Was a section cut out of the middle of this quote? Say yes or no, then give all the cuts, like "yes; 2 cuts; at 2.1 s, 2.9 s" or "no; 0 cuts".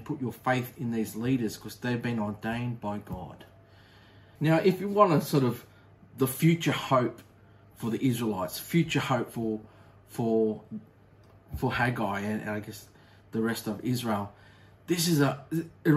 yes; 2 cuts; at 4.4 s, 7.6 s